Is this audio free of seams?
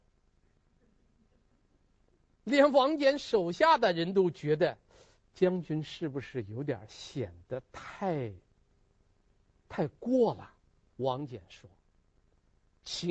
no; 1 cut; at 10.9 s

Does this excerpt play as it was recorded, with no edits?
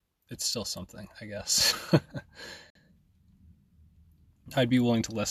yes; 0 cuts

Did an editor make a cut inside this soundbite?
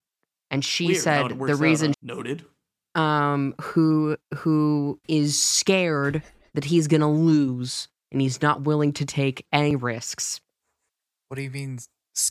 yes; 2 cuts; at 1.9 s, 5.0 s

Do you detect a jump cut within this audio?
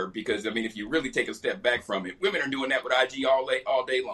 no; 0 cuts

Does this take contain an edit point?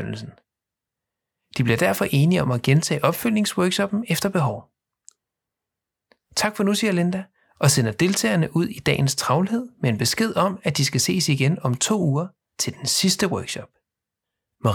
no; 0 cuts

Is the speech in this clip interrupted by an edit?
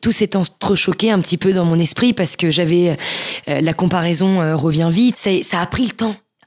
yes; 1 cut; at 5.1 s

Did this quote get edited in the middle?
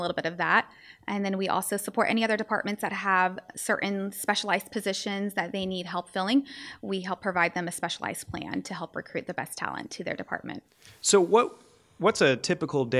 no; 0 cuts

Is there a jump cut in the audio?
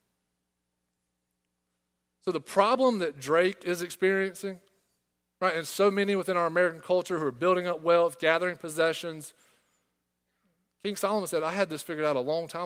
no; 0 cuts

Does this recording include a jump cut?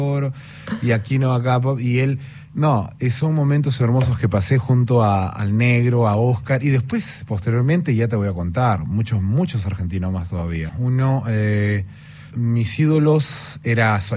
yes; 2 cuts; at 10.7 s, 12.3 s

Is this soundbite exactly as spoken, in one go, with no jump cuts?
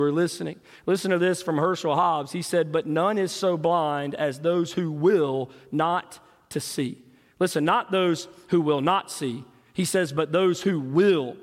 yes; 0 cuts

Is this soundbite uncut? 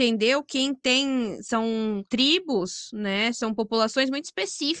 yes; 0 cuts

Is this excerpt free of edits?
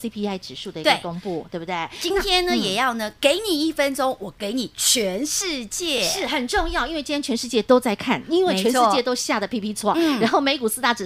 yes; 0 cuts

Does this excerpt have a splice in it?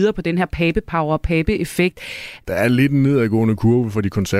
yes; 1 cut; at 2.4 s

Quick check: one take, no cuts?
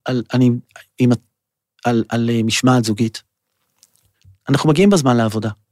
yes; 0 cuts

